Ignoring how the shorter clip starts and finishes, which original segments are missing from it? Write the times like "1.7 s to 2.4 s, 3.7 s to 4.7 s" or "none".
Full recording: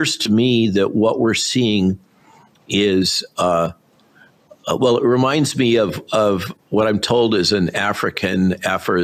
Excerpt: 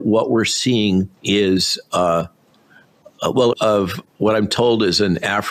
2.1 s to 2.6 s, 5.0 s to 6.0 s